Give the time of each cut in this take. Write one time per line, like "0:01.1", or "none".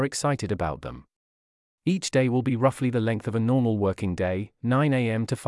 0:01.7